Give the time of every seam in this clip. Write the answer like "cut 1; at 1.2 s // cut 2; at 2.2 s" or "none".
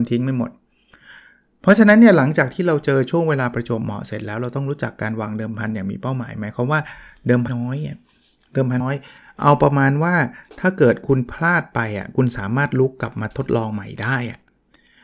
cut 1; at 7.5 s // cut 2; at 8.8 s